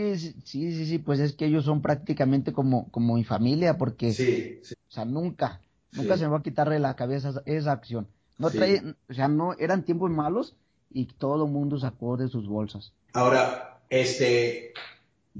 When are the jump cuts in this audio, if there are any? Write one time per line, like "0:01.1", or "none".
0:04.7
0:13.1